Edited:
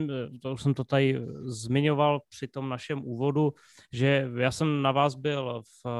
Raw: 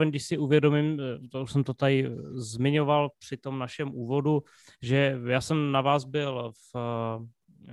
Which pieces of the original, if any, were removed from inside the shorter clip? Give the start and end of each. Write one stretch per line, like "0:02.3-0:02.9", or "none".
none